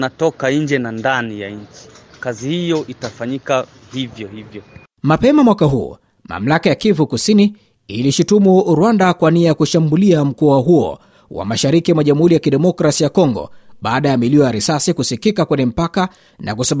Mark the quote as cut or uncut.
uncut